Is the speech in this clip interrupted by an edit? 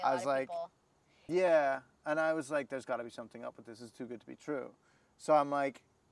yes; 1 cut; at 1.3 s

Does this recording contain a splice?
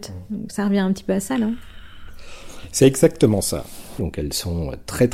yes; 1 cut; at 4.0 s

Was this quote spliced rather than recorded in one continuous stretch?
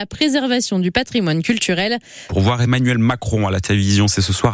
yes; 1 cut; at 2.3 s

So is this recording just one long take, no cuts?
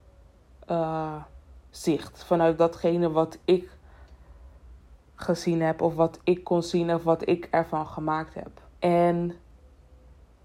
no; 1 cut; at 8.8 s

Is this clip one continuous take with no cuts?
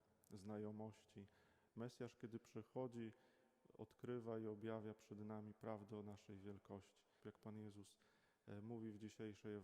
no; 2 cuts; at 1.7 s, 7.2 s

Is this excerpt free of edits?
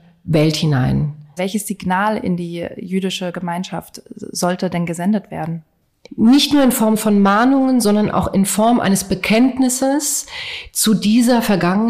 no; 2 cuts; at 1.4 s, 6.0 s

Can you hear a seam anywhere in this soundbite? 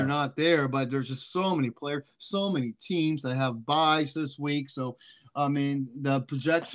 no; 0 cuts

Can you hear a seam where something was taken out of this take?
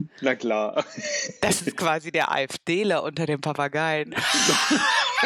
no; 0 cuts

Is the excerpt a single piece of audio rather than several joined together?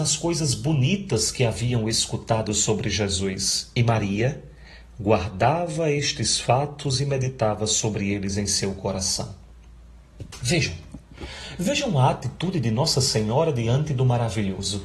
yes; 0 cuts

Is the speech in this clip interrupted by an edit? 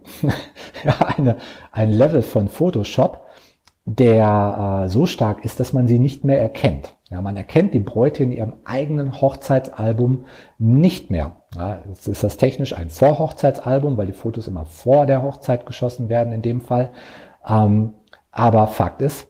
no; 0 cuts

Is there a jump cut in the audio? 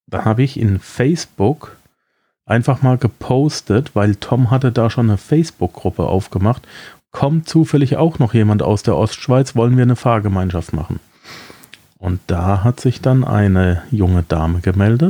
yes; 1 cut; at 7.0 s

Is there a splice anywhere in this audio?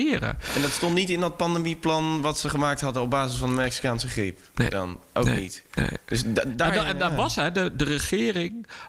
no; 0 cuts

